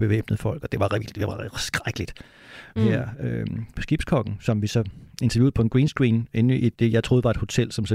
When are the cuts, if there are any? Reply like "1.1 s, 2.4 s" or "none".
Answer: 2.8 s, 6.7 s